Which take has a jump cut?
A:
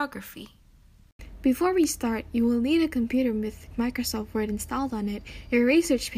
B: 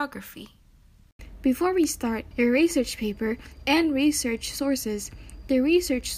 B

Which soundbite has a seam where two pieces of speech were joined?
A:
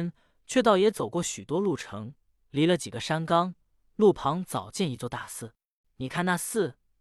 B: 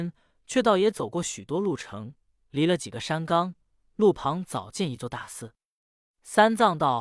A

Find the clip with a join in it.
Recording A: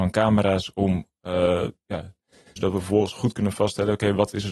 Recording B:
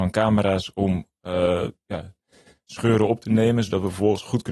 A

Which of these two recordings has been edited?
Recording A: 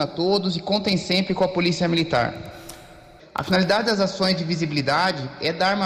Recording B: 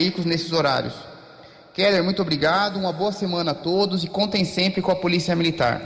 A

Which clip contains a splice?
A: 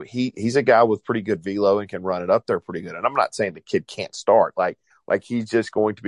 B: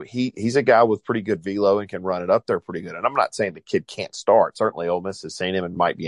A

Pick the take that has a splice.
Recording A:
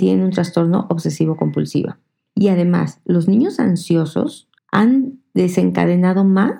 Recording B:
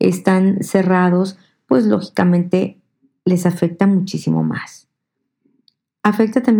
A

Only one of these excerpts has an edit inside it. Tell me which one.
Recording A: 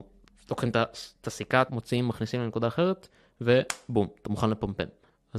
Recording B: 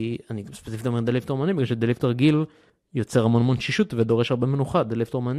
A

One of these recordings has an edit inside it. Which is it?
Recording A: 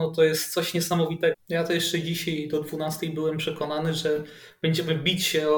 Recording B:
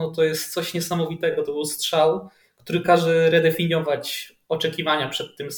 A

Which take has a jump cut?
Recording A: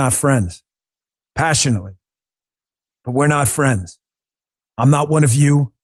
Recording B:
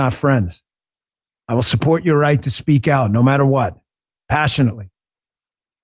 A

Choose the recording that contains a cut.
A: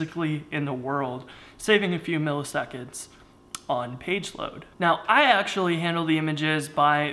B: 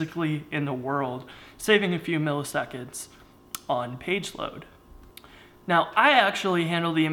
A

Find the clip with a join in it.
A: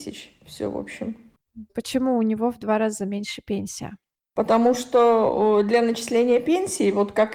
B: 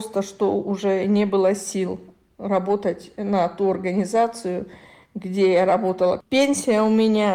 A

